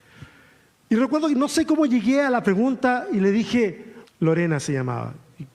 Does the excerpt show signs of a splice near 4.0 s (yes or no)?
yes